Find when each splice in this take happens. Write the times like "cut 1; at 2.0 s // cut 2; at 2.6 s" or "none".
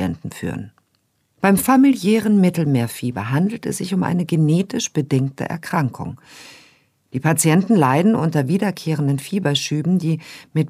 none